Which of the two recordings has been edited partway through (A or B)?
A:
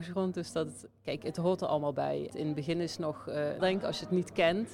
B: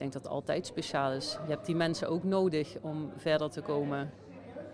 A